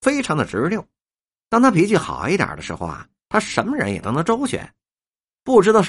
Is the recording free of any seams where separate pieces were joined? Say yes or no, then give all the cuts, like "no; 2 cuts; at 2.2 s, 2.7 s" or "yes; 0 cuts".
yes; 0 cuts